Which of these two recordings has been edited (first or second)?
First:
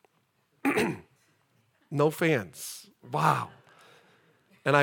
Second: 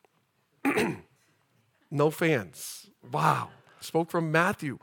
second